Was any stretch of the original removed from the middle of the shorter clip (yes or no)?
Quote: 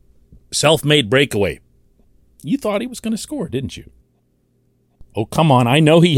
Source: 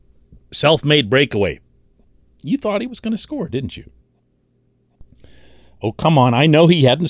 yes